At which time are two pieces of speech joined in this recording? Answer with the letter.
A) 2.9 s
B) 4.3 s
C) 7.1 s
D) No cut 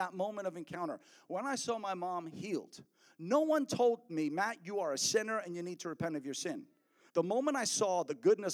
C